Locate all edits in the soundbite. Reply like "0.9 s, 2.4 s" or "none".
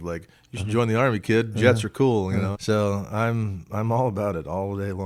2.5 s